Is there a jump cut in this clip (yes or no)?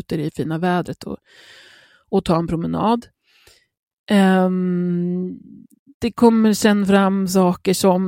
no